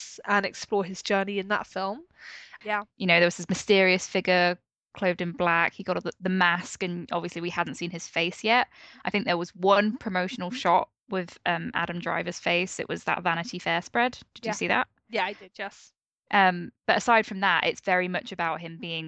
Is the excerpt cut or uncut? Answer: cut